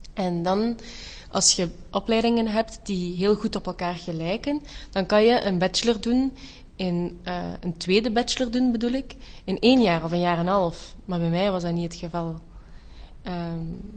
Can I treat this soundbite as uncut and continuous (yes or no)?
yes